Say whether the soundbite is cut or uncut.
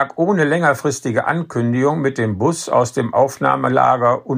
uncut